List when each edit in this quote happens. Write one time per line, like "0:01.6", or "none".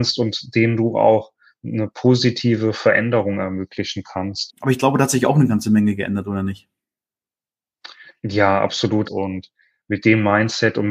0:04.5
0:09.1